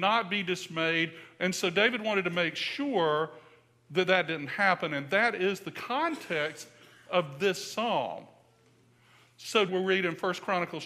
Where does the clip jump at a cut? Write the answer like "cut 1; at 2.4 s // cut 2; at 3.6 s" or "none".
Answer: cut 1; at 1.4 s // cut 2; at 9.7 s